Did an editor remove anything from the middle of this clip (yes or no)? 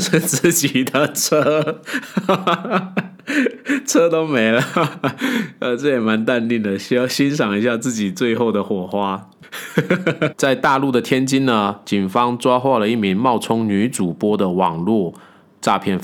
yes